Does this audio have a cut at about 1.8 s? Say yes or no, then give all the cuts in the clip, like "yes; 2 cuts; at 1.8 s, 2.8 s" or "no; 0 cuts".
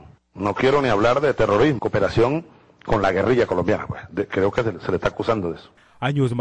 yes; 1 cut; at 1.8 s